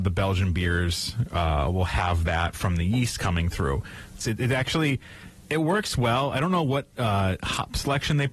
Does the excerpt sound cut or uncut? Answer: cut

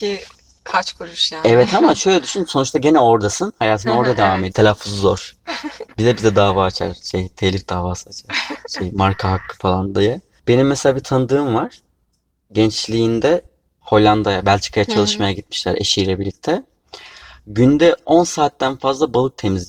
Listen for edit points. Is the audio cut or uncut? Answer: cut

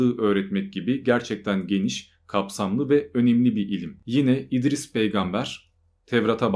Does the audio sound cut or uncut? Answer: uncut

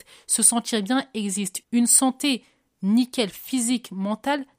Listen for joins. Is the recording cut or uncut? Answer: cut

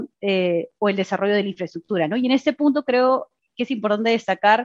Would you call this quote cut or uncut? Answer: uncut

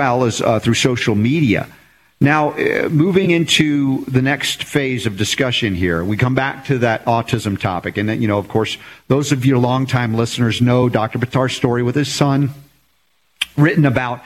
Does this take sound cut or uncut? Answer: uncut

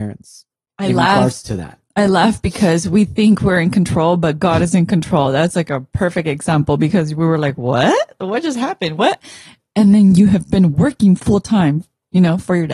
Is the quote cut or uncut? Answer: uncut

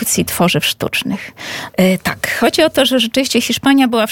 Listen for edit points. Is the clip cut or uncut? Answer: cut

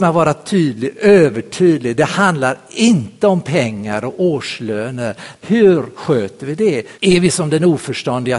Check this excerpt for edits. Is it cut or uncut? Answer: cut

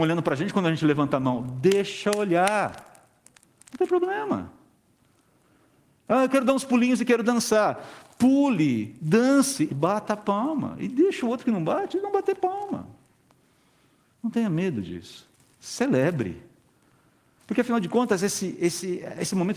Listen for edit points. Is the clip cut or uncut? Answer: cut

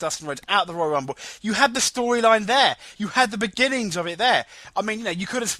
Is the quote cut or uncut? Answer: uncut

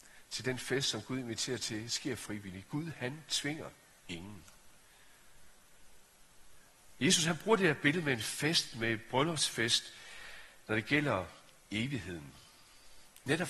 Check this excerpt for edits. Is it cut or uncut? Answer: uncut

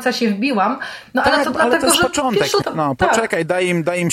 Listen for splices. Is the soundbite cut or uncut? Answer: cut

